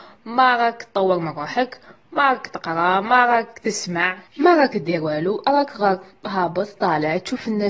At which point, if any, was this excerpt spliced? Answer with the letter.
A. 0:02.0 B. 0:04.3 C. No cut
B